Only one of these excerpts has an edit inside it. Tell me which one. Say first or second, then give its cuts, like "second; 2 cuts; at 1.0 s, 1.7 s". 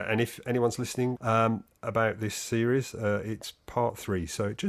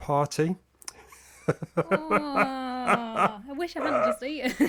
first; 1 cut; at 1.2 s